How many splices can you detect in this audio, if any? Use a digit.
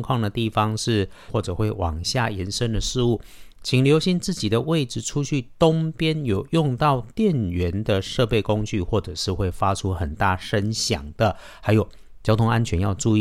1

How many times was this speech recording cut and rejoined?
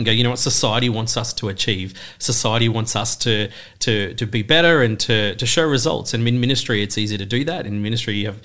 0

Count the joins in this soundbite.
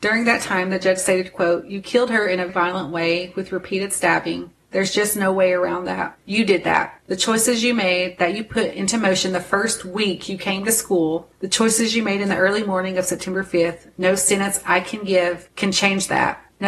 1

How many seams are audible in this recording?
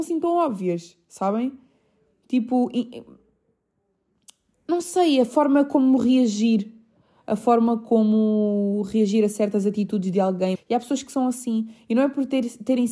1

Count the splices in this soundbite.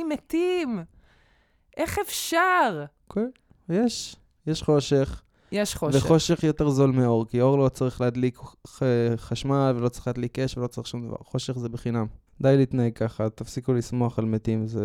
2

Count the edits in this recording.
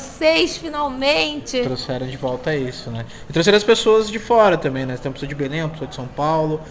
0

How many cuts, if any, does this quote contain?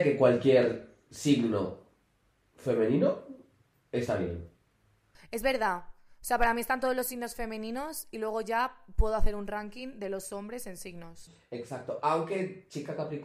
0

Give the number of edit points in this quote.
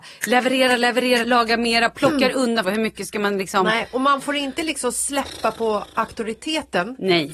2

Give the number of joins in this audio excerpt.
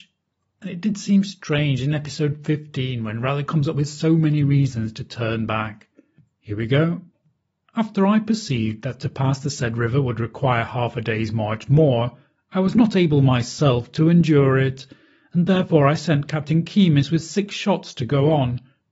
1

